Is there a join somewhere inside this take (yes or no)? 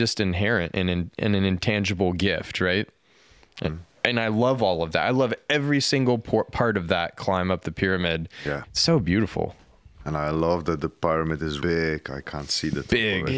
yes